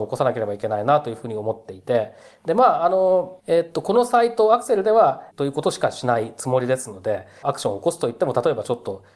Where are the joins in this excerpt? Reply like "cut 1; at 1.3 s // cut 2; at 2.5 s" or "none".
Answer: cut 1; at 3.4 s // cut 2; at 5.3 s // cut 3; at 7.4 s

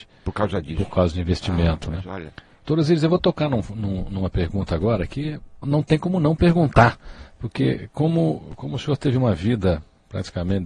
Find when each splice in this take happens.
cut 1; at 5.6 s

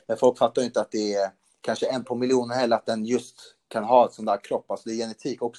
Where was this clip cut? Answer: none

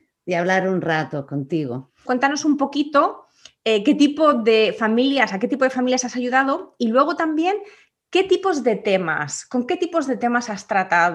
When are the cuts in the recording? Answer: cut 1; at 2.1 s

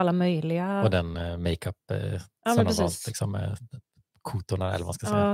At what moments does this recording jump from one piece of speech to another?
none

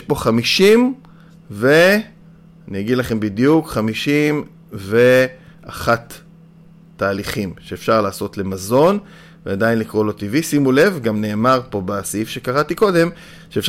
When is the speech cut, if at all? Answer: none

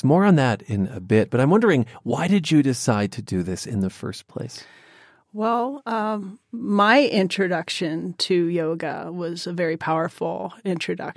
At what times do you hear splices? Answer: none

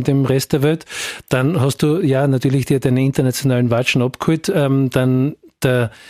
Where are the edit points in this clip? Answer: none

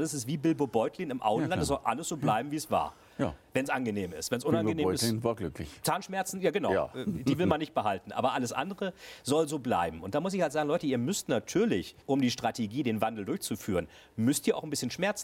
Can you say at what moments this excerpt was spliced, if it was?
cut 1; at 12.0 s

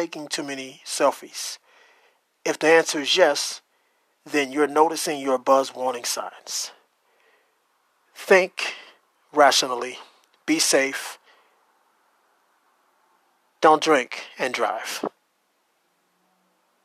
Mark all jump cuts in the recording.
none

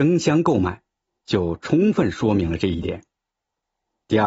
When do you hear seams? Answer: cut 1; at 1.2 s

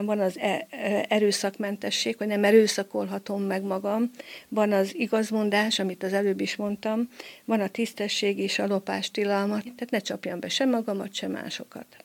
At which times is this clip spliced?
cut 1; at 9.7 s

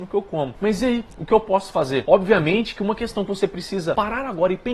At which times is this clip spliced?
none

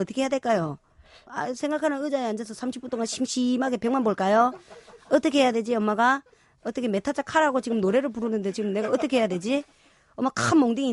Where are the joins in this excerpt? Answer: none

